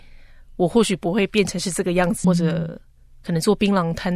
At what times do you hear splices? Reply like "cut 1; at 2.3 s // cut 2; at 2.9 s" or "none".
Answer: cut 1; at 2.2 s